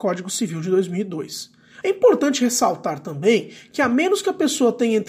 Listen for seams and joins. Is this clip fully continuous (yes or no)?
no